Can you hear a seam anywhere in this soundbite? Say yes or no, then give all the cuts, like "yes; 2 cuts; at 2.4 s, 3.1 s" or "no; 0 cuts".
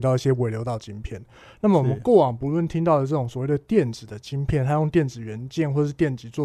no; 0 cuts